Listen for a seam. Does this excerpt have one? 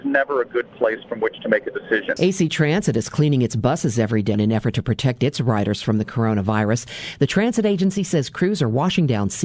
yes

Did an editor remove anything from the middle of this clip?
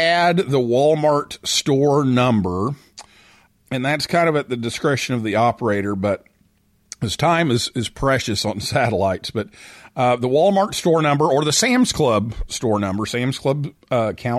no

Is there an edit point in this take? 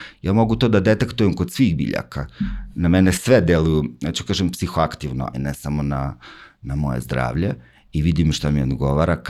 yes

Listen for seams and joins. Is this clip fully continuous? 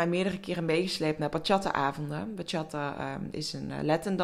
yes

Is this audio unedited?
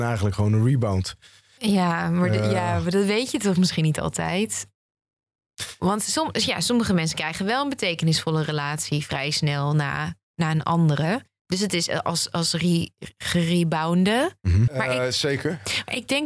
no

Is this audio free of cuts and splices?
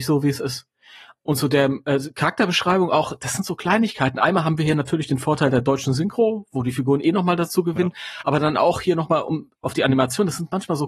yes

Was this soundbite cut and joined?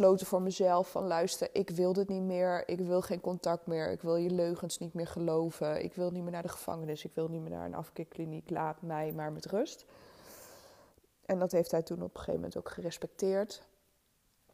no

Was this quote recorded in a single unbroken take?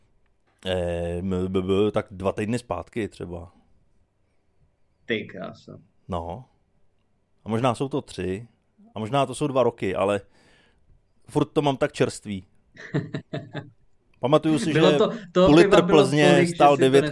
yes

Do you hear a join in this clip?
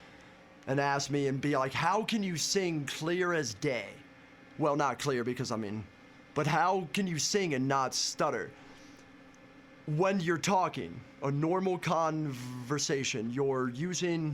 yes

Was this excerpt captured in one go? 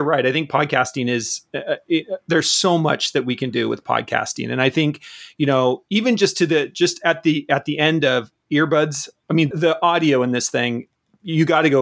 no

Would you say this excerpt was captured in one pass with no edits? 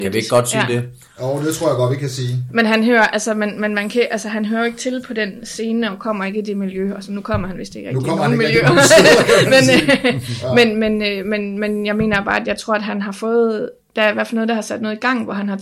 yes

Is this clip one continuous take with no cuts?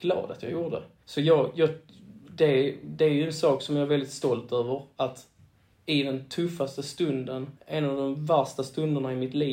no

